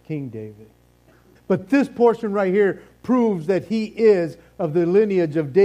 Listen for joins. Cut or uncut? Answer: cut